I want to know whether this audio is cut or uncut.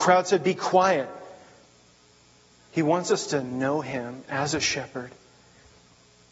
cut